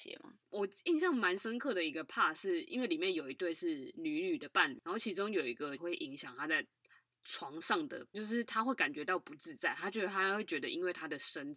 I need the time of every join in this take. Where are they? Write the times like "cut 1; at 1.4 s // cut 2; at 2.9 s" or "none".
cut 1; at 5.8 s // cut 2; at 8.1 s